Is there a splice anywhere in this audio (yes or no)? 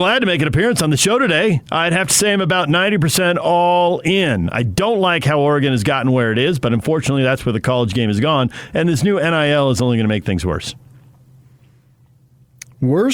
no